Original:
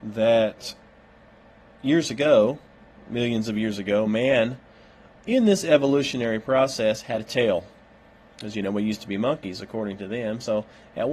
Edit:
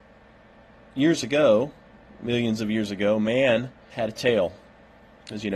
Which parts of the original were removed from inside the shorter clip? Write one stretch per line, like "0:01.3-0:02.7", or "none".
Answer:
0:04.8-0:07.0